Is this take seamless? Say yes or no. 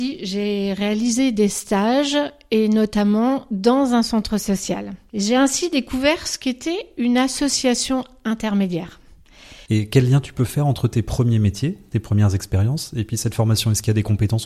no